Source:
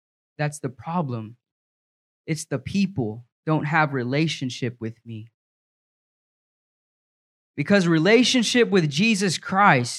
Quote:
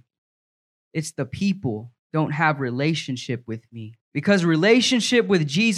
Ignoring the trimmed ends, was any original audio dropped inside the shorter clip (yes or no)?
yes